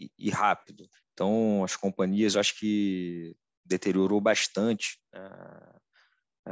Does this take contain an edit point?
yes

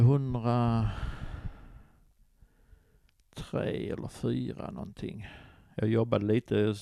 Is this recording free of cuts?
yes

